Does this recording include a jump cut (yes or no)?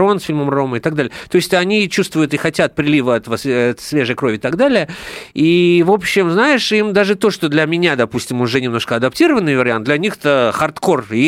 no